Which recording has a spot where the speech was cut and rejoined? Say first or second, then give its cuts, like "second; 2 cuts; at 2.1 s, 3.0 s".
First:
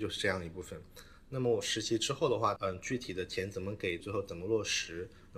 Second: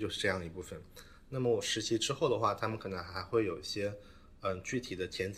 first; 2 cuts; at 2.6 s, 4.0 s